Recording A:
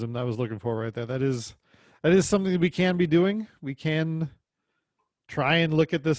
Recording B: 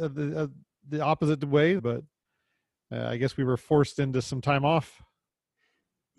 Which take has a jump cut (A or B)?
B